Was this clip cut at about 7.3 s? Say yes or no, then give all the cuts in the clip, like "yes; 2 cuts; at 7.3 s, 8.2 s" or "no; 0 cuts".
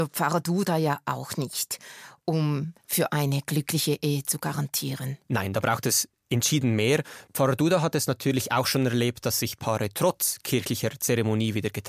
no; 0 cuts